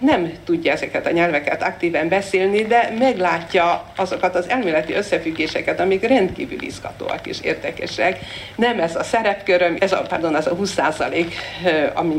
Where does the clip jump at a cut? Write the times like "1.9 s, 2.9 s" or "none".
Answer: 8.6 s, 9.8 s